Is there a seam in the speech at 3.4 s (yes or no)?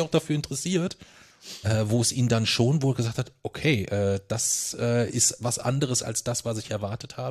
no